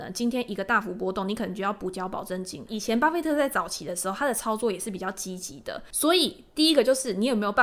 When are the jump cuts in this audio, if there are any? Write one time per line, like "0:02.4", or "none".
0:02.7
0:05.9